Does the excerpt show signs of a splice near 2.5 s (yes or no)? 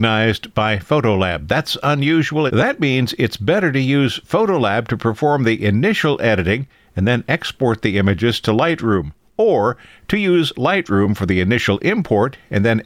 yes